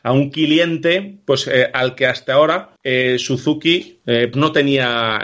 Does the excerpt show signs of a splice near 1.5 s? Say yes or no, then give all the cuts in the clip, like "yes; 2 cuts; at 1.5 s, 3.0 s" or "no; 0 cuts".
no; 2 cuts; at 2.8 s, 4.3 s